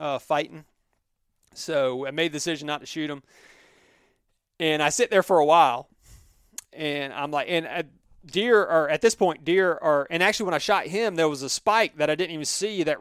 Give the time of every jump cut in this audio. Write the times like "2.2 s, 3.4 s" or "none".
none